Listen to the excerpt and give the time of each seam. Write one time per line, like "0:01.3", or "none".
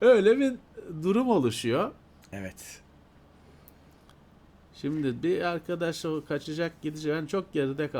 0:02.2

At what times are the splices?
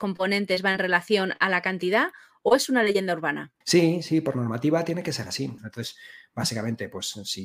0:03.6
0:05.6

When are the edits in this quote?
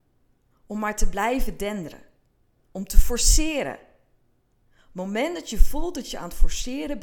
0:04.5

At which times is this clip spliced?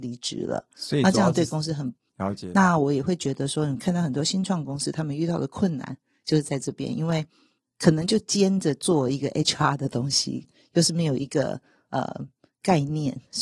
0:02.1
0:10.4

